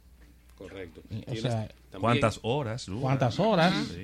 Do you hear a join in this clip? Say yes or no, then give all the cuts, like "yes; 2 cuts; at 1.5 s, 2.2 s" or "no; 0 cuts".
no; 0 cuts